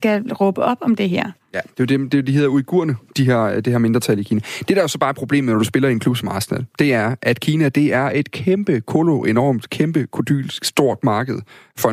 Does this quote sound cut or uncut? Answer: uncut